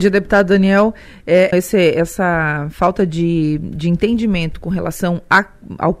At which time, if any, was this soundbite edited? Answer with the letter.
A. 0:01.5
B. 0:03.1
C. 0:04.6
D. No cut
A